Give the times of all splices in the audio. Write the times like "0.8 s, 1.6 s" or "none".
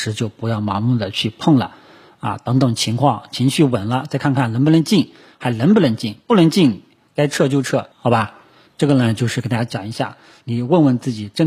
7.9 s, 10.4 s